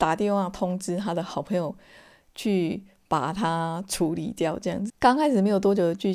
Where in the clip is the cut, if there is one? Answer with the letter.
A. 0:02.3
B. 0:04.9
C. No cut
B